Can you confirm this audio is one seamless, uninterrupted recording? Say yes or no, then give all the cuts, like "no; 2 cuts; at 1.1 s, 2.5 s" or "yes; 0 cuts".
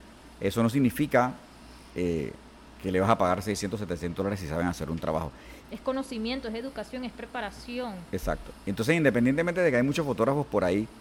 no; 1 cut; at 5.6 s